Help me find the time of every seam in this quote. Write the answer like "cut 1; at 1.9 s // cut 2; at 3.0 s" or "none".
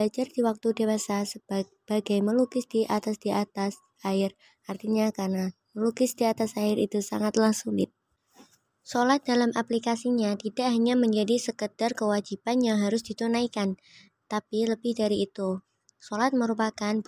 none